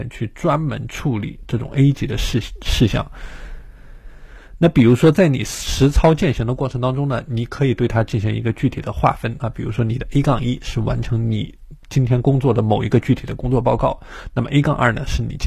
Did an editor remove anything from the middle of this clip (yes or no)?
yes